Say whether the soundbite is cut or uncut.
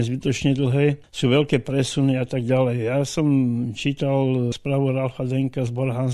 uncut